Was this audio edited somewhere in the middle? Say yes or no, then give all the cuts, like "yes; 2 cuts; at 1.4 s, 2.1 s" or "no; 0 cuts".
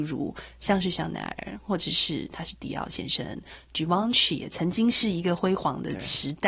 no; 0 cuts